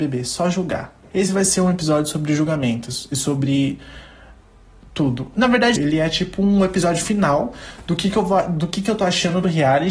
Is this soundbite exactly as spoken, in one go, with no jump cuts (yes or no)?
no